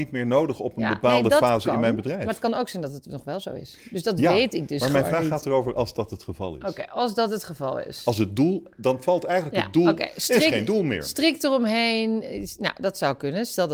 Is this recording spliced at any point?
no; 0 cuts

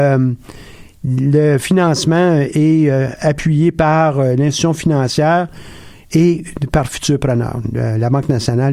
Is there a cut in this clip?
no; 0 cuts

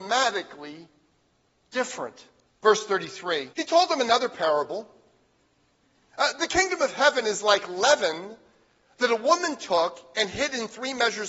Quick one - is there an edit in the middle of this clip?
yes; 2 cuts; at 2.5 s, 3.5 s

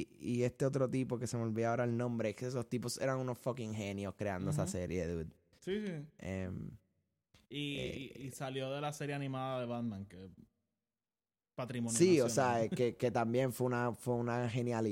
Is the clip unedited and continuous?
yes; 0 cuts

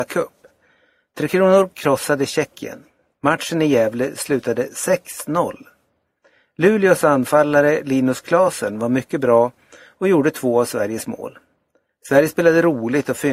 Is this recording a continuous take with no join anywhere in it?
yes; 0 cuts

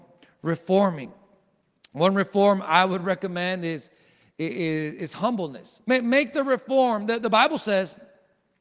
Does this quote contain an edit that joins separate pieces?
yes; 1 cut; at 5.8 s

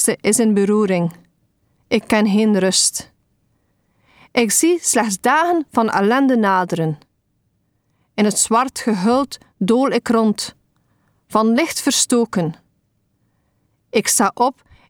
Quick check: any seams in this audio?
no; 0 cuts

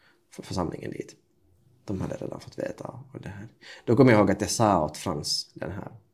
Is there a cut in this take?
no; 0 cuts

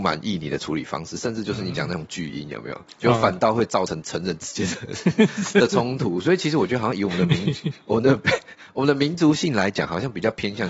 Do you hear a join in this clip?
no; 0 cuts

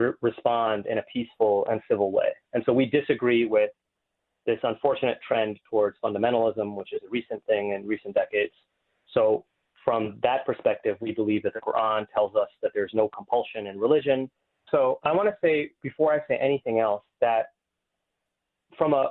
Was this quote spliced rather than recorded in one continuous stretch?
yes; 1 cut; at 14.7 s

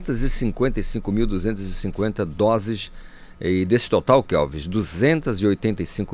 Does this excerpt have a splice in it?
no; 0 cuts

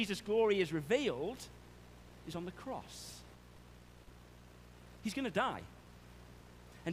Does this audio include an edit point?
yes; 1 cut; at 5.0 s

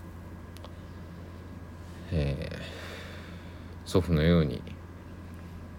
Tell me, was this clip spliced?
no; 0 cuts

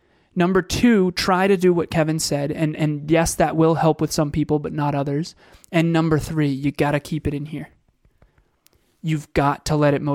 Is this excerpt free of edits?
yes; 0 cuts

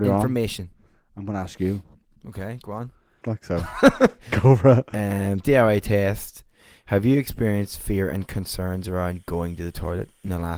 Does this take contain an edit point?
yes; 1 cut; at 3.2 s

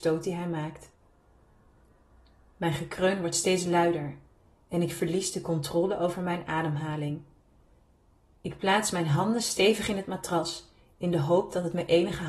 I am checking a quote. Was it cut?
no; 0 cuts

